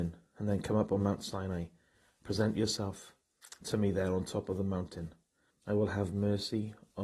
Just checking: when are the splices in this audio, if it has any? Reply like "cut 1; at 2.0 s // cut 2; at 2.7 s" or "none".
cut 1; at 5.5 s